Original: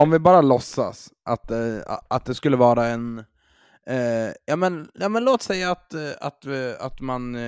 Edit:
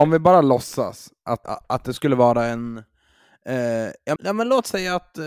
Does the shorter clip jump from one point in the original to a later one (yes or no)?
yes